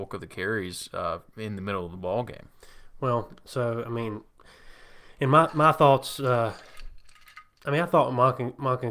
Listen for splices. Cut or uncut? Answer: uncut